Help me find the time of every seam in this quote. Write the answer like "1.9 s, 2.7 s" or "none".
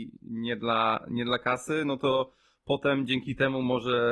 none